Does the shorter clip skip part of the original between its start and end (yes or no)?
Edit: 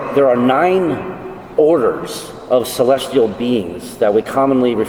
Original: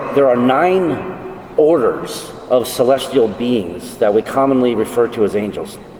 no